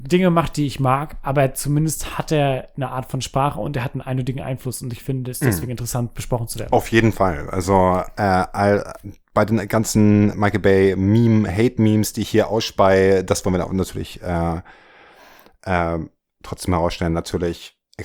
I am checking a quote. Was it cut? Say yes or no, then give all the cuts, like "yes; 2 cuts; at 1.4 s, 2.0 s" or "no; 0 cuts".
no; 0 cuts